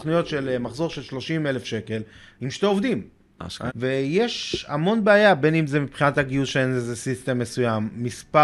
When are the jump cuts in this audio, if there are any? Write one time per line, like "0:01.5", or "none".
0:03.7